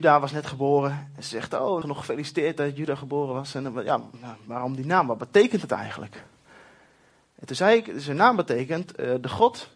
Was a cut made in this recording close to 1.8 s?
yes; 1 cut; at 1.8 s

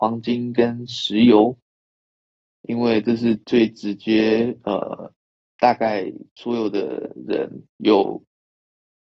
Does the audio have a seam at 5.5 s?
no; 1 cut; at 3.4 s

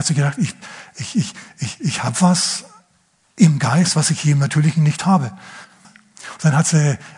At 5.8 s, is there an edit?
yes; 1 cut; at 5.8 s

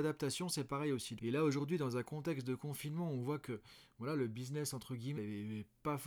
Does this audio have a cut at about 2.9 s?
no; 2 cuts; at 1.2 s, 5.2 s

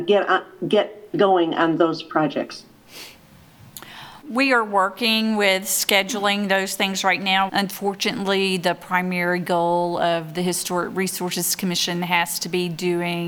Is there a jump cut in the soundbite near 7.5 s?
yes; 2 cuts; at 4.2 s, 7.5 s

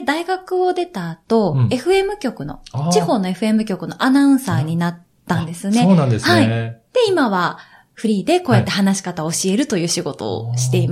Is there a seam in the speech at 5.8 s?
no; 0 cuts

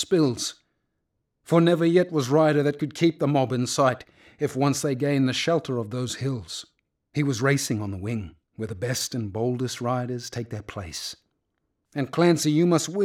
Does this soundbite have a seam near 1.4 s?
no; 3 cuts; at 7.0 s, 8.4 s, 11.9 s

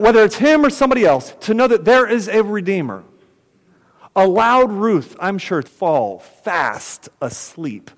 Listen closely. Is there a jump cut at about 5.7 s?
yes; 1 cut; at 5.7 s

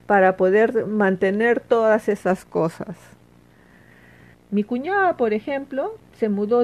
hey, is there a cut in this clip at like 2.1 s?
no; 1 cut; at 4.3 s

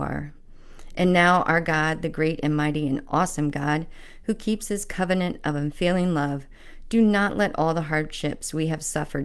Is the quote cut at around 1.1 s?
no; 0 cuts

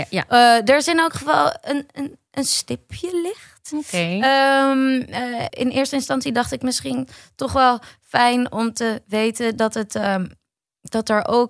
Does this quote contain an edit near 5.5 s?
yes; 1 cut; at 5.5 s

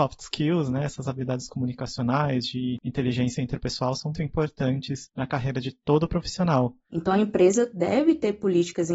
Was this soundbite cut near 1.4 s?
no; 2 cuts; at 4.1 s, 6.9 s

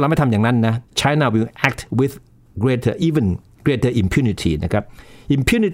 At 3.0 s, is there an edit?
no; 0 cuts

